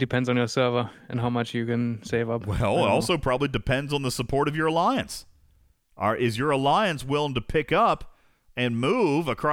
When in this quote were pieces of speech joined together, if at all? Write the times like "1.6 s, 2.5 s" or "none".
none